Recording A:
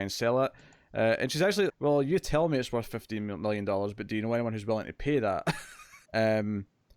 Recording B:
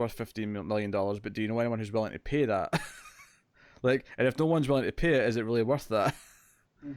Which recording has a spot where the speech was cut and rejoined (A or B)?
A